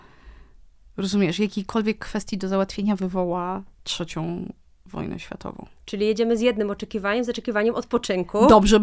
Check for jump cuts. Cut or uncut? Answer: uncut